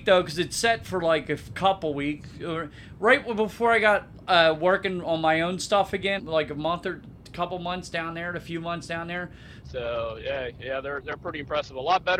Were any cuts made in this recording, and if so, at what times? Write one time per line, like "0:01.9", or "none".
0:06.2
0:09.6